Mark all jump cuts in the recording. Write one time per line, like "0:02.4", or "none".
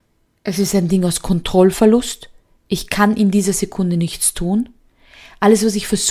none